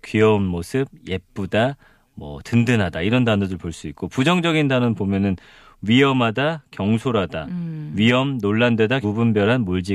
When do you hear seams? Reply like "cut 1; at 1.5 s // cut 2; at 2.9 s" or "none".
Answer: cut 1; at 9.0 s